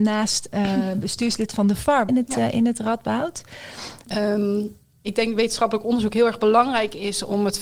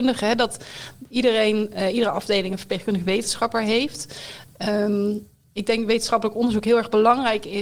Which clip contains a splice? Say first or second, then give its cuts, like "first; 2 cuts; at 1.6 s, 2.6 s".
first; 2 cuts; at 2.1 s, 4.1 s